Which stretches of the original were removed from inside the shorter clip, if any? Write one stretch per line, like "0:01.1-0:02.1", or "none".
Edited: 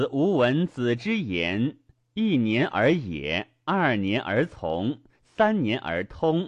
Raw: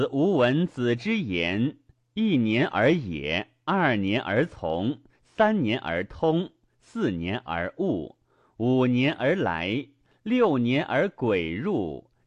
none